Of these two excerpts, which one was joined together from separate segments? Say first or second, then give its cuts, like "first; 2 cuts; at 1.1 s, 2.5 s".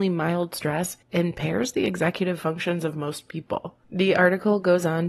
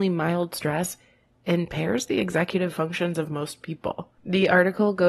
first; 1 cut; at 1.0 s